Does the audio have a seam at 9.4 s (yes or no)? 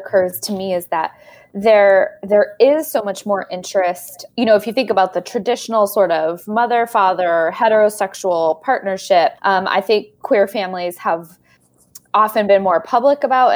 yes